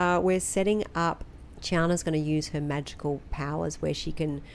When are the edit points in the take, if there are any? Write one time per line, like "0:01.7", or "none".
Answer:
0:01.6

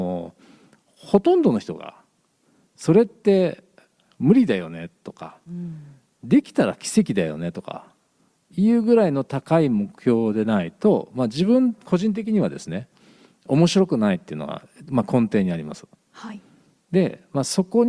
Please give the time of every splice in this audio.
none

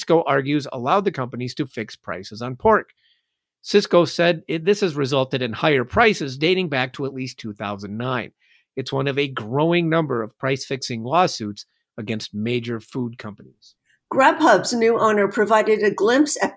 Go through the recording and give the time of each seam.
none

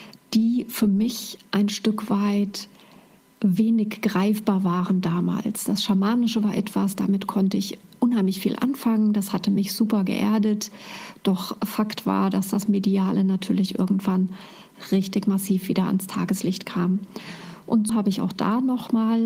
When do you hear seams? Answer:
0:17.9

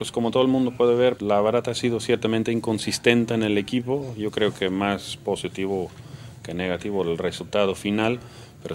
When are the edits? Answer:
0:01.2

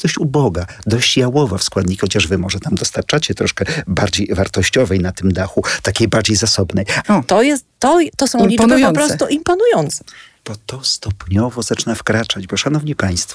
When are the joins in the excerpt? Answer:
0:07.0

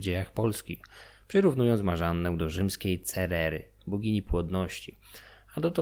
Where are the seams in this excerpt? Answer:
0:03.8

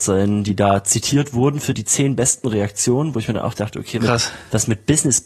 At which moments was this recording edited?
0:04.0

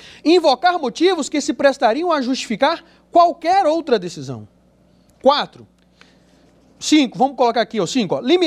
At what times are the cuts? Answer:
none

